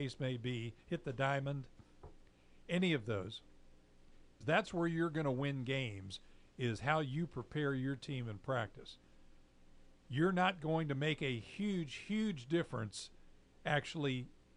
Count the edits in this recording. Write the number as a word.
one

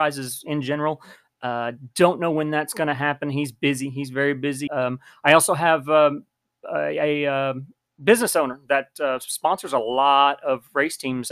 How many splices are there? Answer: one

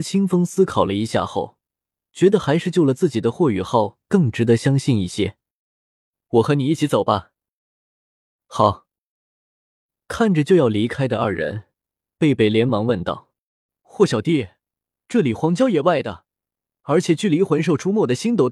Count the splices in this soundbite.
zero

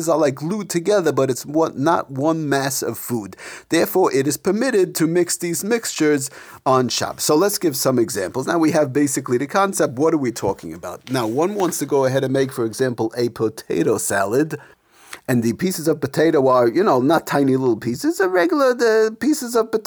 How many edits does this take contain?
zero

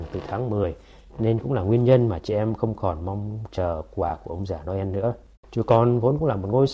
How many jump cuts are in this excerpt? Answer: one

